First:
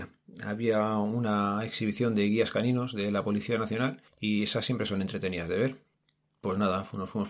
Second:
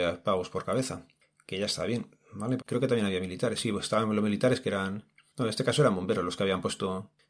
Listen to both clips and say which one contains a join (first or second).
second